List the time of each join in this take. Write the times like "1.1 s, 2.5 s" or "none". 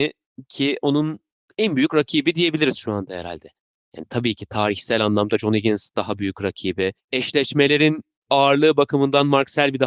none